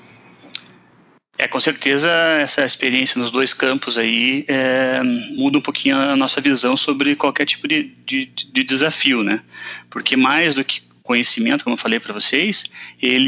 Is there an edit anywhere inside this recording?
no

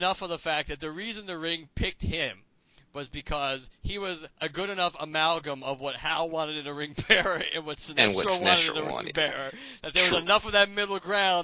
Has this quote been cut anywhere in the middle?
no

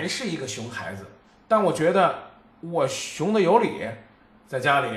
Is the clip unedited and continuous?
yes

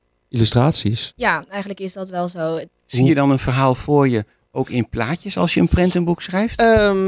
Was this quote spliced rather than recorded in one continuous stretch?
yes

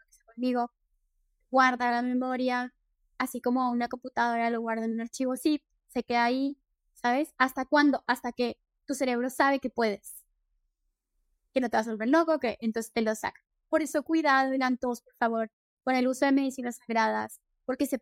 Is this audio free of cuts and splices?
yes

